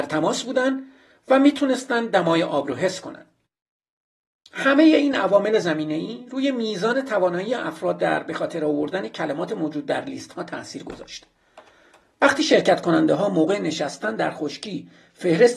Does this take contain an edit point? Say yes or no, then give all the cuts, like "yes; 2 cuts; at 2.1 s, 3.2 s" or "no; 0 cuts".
no; 0 cuts